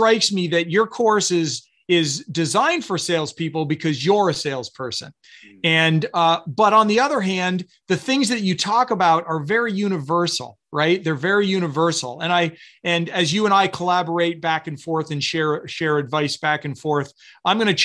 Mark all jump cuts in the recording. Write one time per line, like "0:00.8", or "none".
none

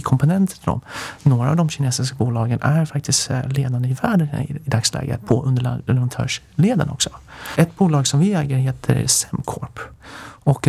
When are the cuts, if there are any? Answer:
0:07.5

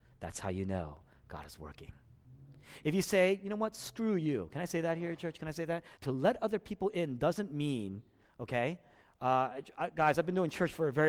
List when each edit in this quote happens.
0:06.0

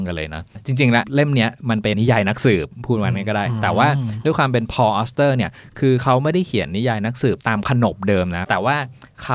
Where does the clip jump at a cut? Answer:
0:01.9

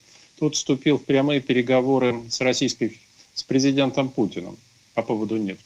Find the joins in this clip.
none

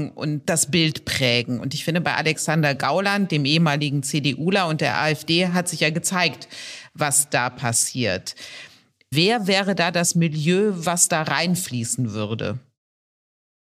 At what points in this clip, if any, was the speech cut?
0:09.1

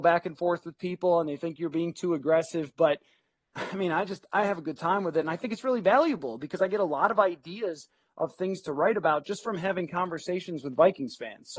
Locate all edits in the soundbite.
none

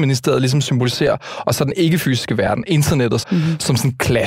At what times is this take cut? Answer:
0:03.2

